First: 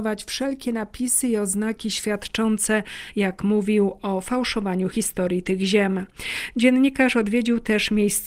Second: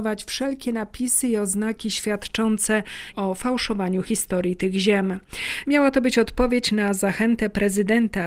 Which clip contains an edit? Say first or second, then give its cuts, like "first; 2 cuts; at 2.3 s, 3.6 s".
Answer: second; 2 cuts; at 3.1 s, 5.6 s